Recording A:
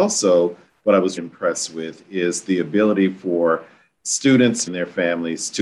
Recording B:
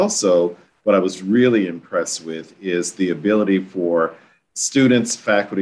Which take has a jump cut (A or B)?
A